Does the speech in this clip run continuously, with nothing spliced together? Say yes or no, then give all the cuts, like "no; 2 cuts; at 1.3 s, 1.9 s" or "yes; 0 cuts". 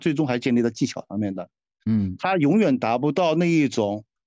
yes; 0 cuts